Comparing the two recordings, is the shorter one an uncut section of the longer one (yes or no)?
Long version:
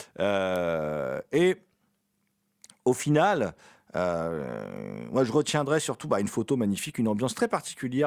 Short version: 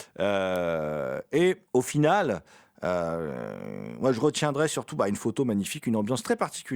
no